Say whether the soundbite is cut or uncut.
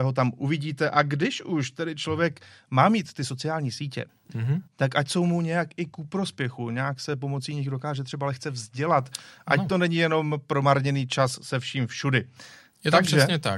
uncut